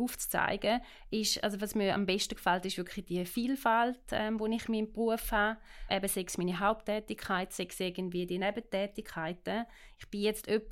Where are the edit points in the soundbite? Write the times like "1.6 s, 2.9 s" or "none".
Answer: none